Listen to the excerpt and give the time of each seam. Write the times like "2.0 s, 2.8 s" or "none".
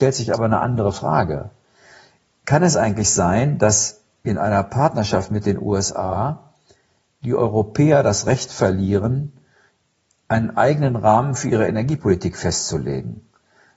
none